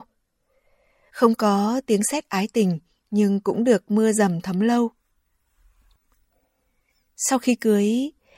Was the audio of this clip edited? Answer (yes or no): yes